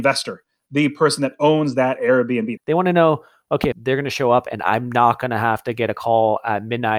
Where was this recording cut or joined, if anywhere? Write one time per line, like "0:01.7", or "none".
0:02.6
0:03.7